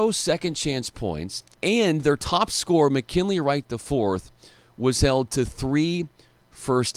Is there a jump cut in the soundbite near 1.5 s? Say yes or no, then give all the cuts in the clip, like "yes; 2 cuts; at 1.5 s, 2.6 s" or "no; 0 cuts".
yes; 1 cut; at 1.5 s